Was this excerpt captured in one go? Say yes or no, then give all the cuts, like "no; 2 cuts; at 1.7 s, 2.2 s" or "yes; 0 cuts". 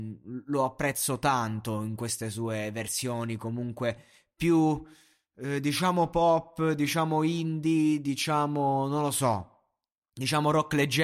yes; 0 cuts